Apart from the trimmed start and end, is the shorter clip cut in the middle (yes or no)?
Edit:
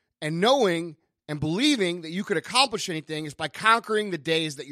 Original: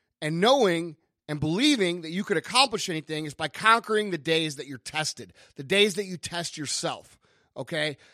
no